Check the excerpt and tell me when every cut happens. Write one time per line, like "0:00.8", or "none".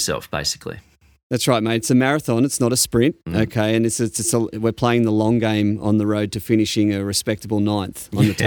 none